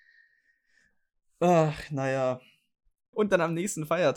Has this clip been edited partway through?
yes; 1 cut; at 3.1 s

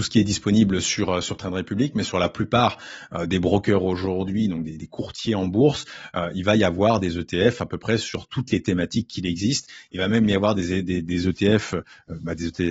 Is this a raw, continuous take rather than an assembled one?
yes; 0 cuts

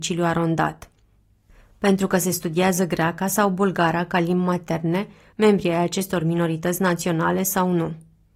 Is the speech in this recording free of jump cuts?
no; 1 cut; at 5.3 s

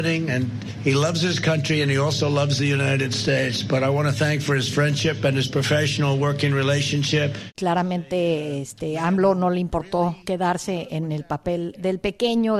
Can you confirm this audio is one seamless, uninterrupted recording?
yes; 0 cuts

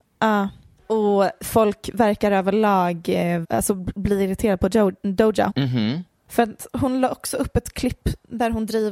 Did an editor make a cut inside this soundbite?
yes; 2 cuts; at 3.4 s, 5.5 s

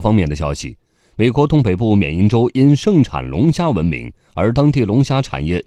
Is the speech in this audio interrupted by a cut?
no; 0 cuts

